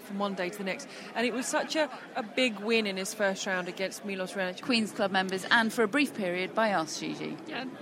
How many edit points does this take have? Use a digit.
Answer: 1